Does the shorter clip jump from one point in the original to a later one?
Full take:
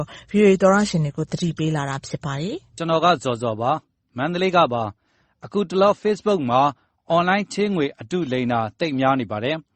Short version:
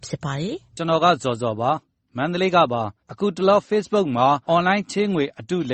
yes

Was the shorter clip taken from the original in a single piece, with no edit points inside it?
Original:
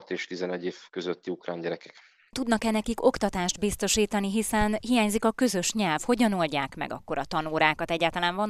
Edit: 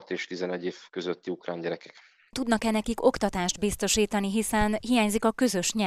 yes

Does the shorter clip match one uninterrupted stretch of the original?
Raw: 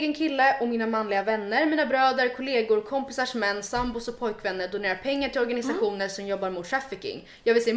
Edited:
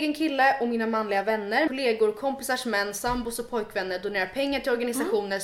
no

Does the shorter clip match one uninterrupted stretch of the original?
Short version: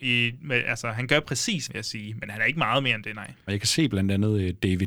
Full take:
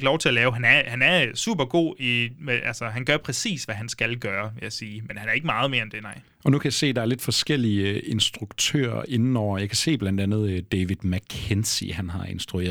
no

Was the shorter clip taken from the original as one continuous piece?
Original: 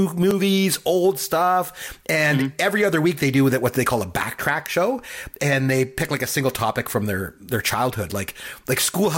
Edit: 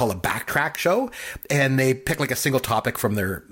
yes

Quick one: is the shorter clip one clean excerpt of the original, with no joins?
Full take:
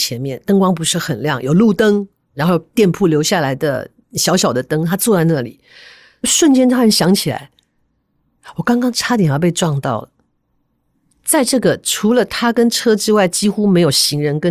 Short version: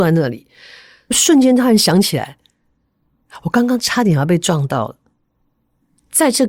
yes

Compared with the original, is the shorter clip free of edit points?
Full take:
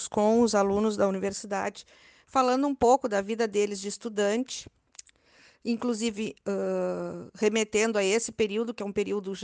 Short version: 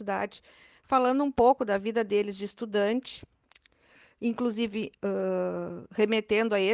yes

